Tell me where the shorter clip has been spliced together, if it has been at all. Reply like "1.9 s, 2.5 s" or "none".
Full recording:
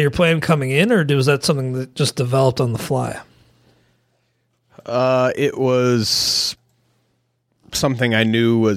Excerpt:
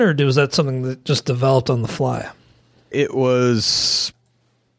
2.9 s